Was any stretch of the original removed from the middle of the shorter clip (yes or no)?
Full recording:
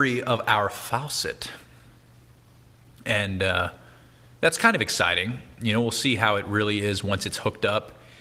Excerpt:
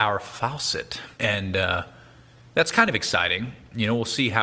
yes